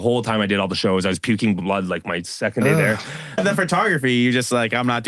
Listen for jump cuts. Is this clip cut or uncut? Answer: cut